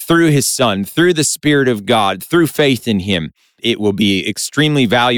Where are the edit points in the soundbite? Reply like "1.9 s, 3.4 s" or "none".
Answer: 3.6 s

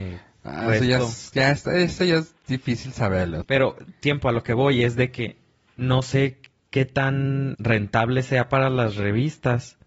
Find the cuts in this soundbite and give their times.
3.4 s, 7.5 s

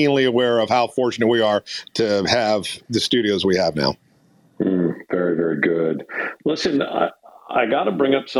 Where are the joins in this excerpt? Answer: none

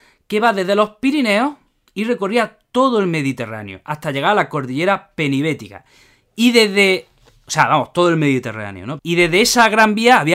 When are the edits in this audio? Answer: 9.0 s

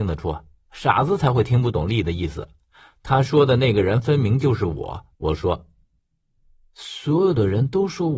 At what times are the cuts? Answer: 5.1 s

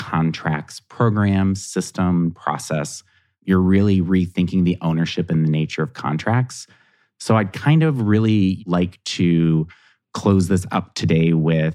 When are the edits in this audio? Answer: 2.3 s

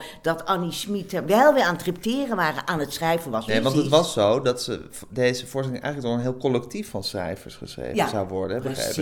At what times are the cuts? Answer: 3.5 s

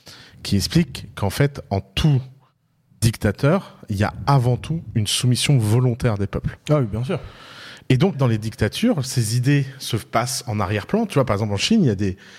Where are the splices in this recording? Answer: 8.1 s

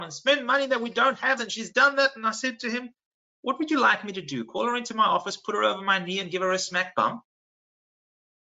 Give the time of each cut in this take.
1.4 s

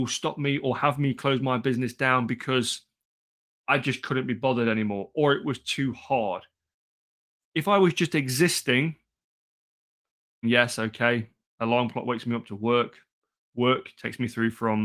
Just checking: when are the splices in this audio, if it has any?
10.4 s

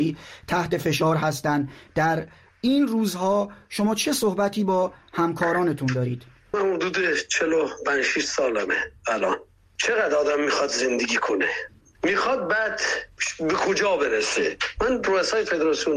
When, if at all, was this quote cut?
11.9 s, 13.2 s

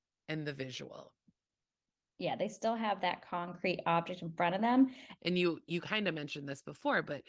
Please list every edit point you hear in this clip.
5.2 s

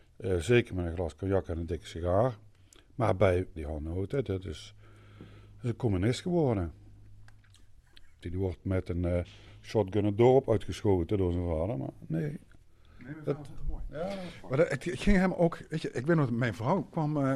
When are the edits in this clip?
3.6 s, 8.2 s

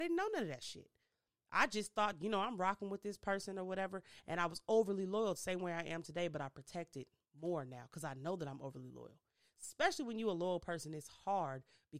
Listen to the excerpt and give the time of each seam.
none

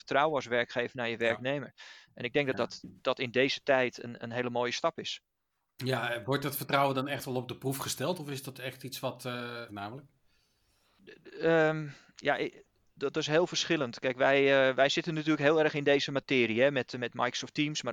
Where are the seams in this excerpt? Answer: 3.0 s, 9.7 s

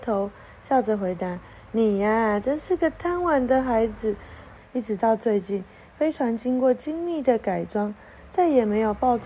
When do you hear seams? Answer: 4.6 s

